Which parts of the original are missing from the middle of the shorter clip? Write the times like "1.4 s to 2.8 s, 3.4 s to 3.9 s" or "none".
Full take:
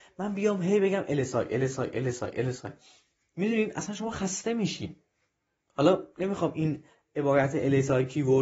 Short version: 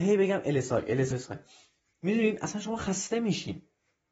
1.7 s to 2.4 s